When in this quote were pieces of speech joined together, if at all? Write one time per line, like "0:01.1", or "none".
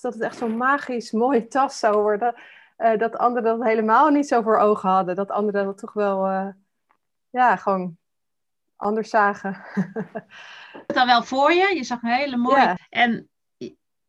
0:10.9
0:12.8

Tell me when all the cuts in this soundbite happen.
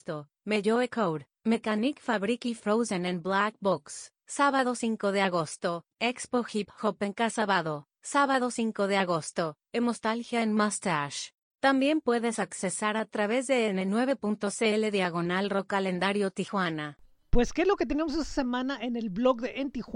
0:11.5

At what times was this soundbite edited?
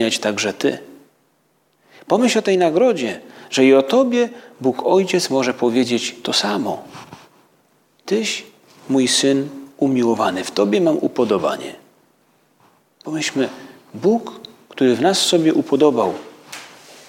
none

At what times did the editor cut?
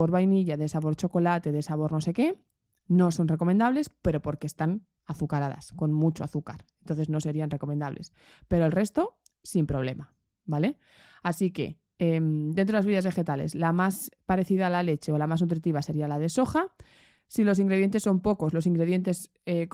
none

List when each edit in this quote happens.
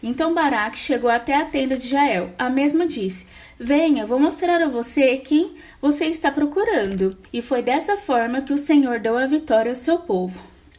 0:07.2

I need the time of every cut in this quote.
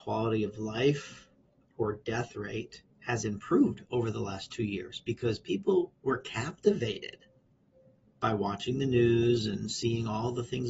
0:02.9

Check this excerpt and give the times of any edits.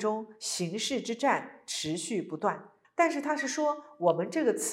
0:02.8

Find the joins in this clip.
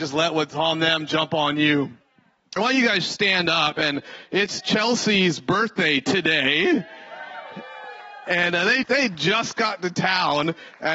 0:02.6
0:08.8

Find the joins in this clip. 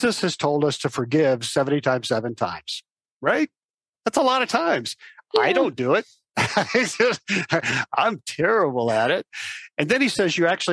none

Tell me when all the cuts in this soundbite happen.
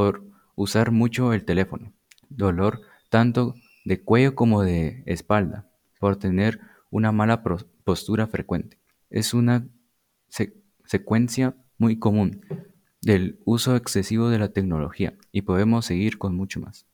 0:02.2
0:09.0

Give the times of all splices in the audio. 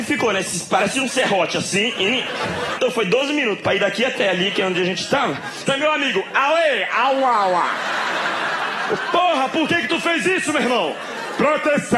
0:02.8
0:05.7

